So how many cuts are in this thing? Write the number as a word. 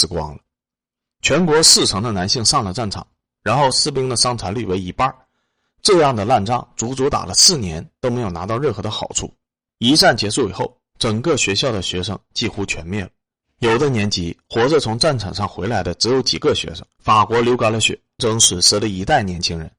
three